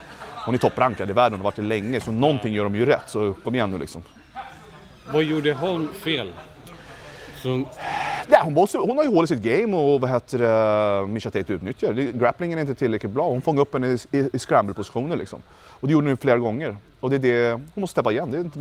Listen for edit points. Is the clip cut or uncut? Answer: uncut